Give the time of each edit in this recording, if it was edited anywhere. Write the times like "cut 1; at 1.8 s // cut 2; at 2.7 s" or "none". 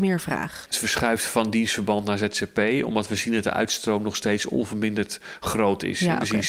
none